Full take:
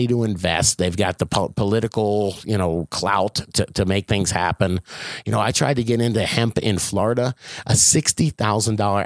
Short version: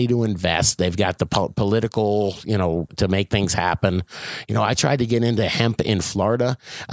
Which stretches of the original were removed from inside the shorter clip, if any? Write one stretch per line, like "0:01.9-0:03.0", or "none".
0:02.9-0:03.7